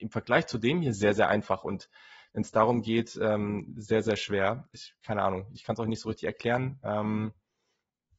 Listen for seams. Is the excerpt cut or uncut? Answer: uncut